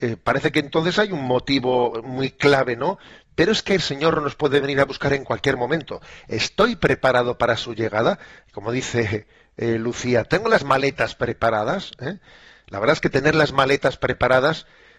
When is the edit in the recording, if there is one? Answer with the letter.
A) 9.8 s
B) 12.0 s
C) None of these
C